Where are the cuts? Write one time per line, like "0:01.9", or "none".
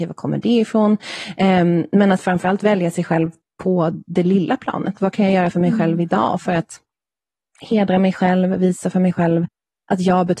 none